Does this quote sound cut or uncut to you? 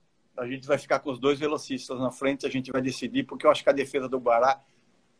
uncut